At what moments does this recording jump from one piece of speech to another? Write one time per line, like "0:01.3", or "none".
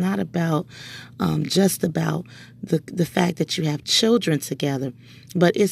none